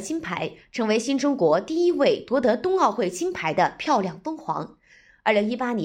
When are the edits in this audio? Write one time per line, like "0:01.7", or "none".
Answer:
none